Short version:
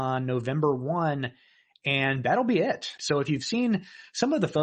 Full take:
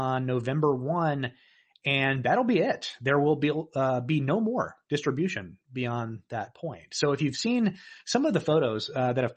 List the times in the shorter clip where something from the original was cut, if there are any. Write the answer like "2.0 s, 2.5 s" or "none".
3.0 s